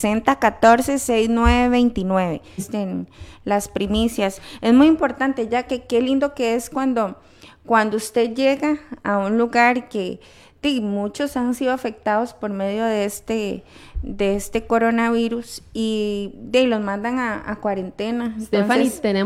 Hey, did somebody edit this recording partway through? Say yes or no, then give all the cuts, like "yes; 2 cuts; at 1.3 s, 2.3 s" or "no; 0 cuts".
yes; 1 cut; at 2.6 s